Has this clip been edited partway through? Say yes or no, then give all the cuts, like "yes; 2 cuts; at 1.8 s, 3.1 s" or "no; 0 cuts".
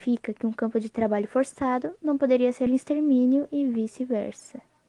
yes; 1 cut; at 2.7 s